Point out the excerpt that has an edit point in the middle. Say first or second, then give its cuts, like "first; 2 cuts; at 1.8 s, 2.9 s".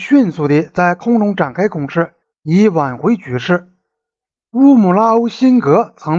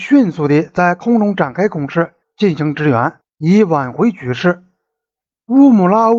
first; 1 cut; at 2.3 s